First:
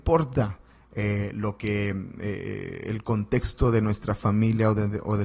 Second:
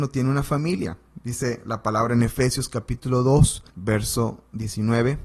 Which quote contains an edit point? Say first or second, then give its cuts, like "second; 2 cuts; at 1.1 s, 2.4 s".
second; 1 cut; at 3.7 s